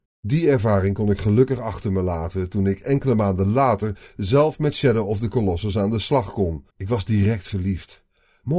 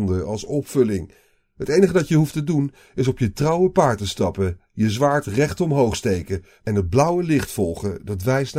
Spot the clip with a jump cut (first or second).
first